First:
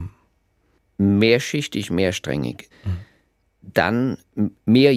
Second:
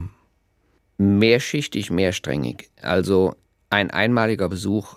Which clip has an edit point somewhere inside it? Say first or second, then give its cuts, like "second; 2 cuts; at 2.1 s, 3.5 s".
first; 1 cut; at 2.7 s